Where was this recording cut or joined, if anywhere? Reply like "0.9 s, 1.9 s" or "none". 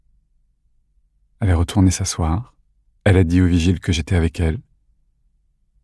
none